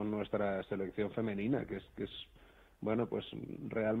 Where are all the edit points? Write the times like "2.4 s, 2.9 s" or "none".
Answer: none